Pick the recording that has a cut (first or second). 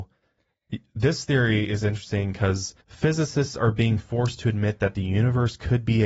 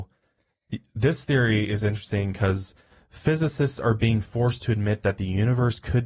first